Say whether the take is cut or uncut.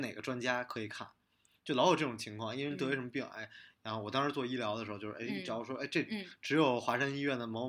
uncut